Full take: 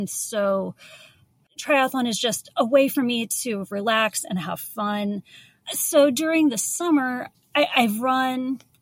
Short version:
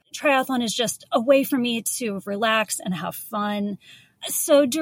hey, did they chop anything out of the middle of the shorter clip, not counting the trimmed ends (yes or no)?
no